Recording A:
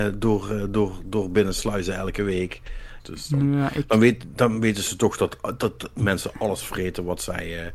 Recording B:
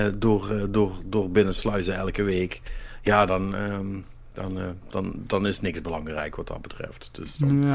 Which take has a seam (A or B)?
A